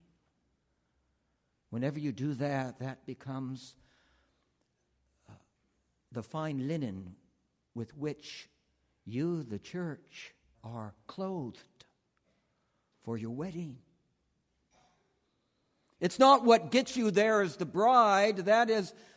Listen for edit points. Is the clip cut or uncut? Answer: cut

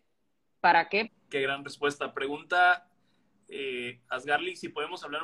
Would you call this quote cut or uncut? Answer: cut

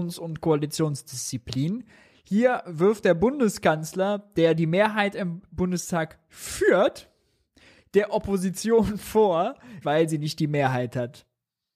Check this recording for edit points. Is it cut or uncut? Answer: cut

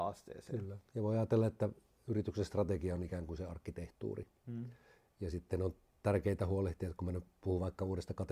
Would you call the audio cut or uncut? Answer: uncut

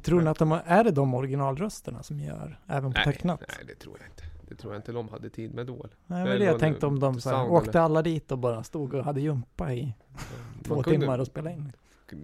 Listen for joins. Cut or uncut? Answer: uncut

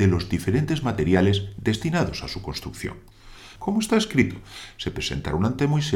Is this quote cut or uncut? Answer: cut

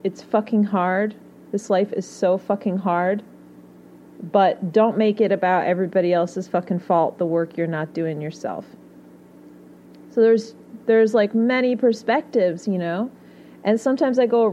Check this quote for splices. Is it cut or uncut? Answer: uncut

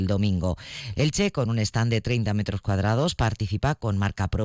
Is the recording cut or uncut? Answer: cut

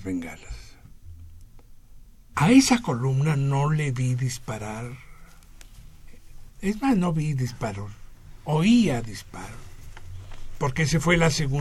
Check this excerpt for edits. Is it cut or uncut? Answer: cut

